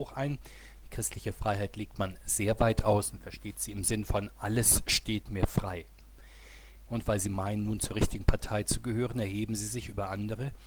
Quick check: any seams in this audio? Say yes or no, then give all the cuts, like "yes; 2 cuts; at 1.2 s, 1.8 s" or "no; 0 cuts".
yes; 1 cut; at 6.9 s